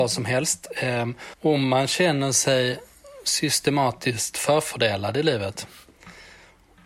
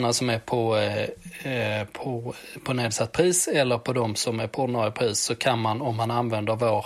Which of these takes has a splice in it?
first; 1 cut; at 1.3 s

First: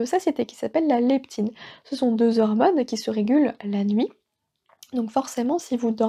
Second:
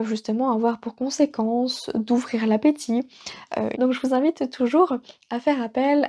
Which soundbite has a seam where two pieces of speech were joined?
second; 1 cut; at 3.7 s

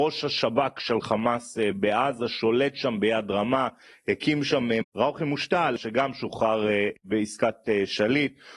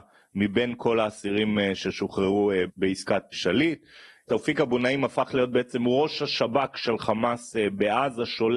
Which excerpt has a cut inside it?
first; 1 cut; at 4.8 s

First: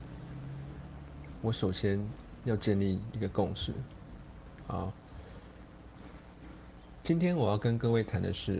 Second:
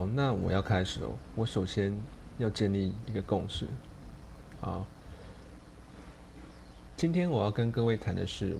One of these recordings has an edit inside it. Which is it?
first; 1 cut; at 1.3 s

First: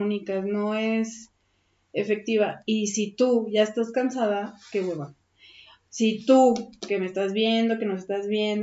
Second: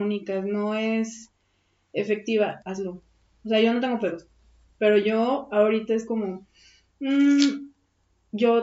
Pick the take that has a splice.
second; 1 cut; at 2.6 s

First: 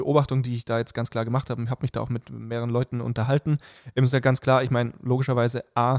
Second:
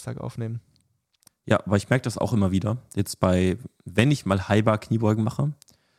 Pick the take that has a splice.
second; 1 cut; at 1.3 s

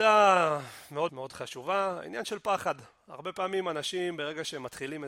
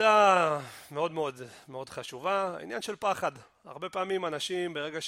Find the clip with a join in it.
first; 1 cut; at 1.1 s

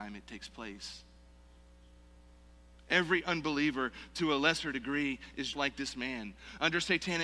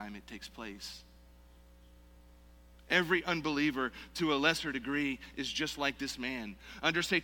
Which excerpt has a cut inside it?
first; 1 cut; at 5.5 s

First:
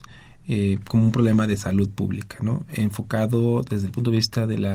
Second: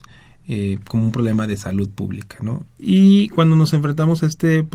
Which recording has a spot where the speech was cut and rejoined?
second; 1 cut; at 2.7 s

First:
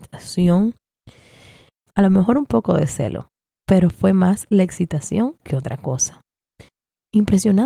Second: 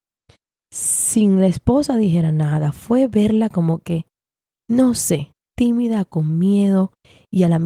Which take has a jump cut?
first; 1 cut; at 1.9 s

